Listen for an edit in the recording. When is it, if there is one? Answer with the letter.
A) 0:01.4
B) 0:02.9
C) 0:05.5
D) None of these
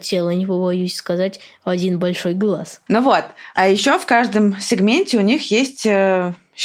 B